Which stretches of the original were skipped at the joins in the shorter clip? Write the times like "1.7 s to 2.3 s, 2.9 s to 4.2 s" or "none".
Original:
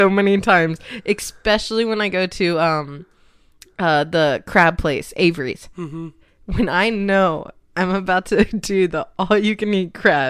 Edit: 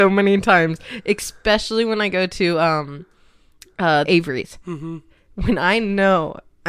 4.0 s to 5.1 s